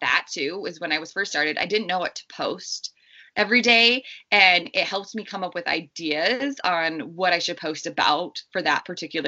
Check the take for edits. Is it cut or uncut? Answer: uncut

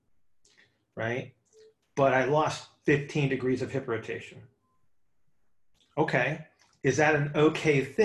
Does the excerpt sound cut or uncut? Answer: uncut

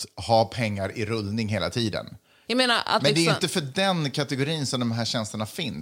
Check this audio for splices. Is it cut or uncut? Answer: cut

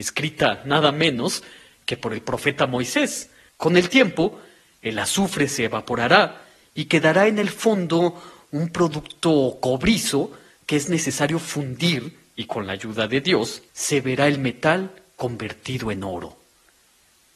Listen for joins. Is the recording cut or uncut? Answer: cut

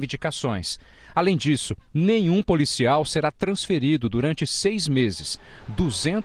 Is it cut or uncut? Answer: uncut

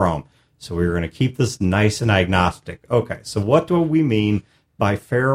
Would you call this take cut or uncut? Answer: uncut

